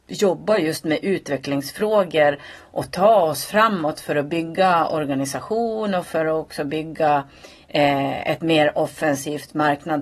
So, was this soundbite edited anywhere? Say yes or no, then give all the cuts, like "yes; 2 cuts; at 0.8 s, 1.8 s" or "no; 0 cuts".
no; 0 cuts